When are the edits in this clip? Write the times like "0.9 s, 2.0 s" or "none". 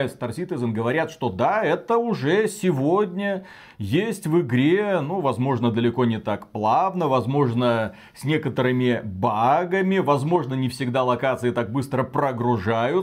none